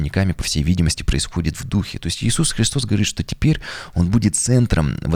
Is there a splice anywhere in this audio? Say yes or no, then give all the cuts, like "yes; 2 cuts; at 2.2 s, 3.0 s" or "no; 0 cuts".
no; 0 cuts